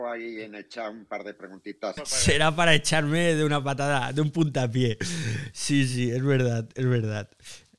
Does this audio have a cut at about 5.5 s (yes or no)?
no